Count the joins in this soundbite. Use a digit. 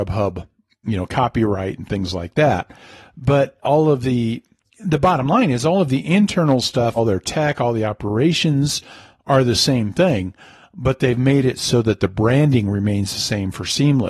1